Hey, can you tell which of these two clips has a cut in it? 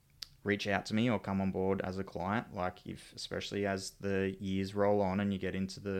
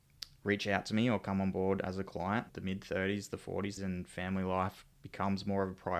second; 2 cuts; at 2.5 s, 3.8 s

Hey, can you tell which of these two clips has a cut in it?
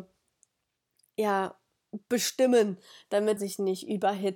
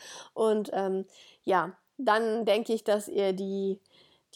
first; 1 cut; at 3.4 s

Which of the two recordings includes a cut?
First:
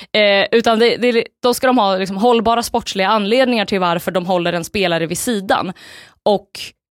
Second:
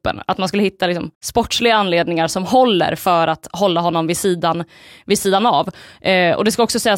second; 1 cut; at 1.1 s

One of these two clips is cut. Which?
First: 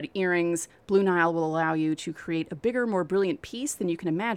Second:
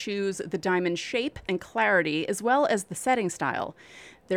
second; 1 cut; at 1.5 s

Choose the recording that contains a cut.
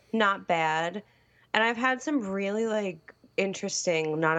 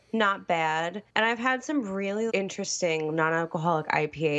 second; 2 cuts; at 1.1 s, 2.3 s

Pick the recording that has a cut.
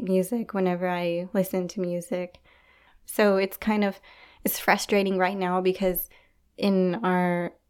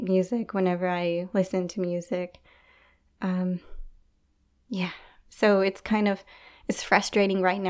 first; 1 cut; at 2.9 s

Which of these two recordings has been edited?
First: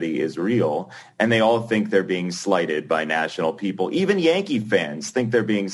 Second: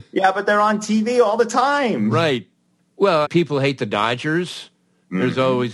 second; 1 cut; at 3.2 s

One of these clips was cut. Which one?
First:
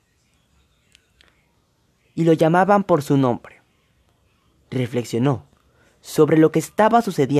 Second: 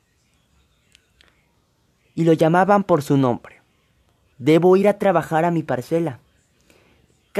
second; 1 cut; at 4.3 s

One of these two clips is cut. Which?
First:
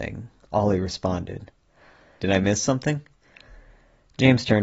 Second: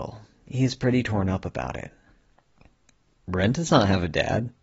first; 1 cut; at 2.2 s

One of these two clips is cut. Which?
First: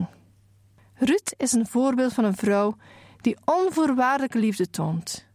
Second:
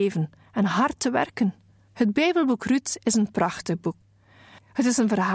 second; 1 cut; at 1.9 s

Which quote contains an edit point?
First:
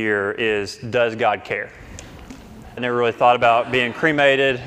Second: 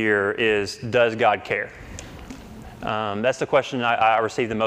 first; 1 cut; at 2.8 s

